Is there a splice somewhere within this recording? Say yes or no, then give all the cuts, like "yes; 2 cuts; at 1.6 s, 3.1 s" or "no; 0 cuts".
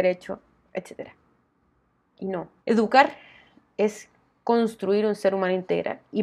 yes; 1 cut; at 2.6 s